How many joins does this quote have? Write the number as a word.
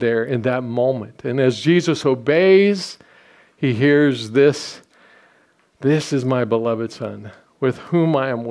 zero